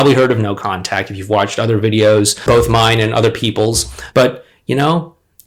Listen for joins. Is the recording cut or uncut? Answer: cut